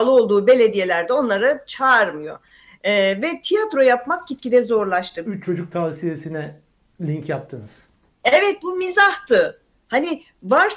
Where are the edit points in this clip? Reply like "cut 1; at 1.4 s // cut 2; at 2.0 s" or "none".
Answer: cut 1; at 5.2 s